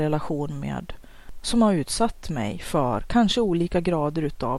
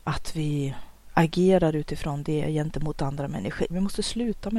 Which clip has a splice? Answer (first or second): second